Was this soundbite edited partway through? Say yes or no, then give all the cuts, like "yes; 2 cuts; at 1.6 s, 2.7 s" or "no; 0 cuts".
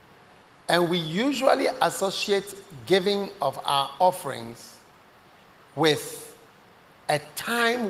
no; 0 cuts